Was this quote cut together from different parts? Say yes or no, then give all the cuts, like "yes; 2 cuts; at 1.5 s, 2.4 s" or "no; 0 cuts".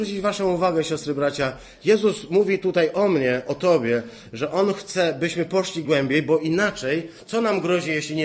yes; 1 cut; at 5.8 s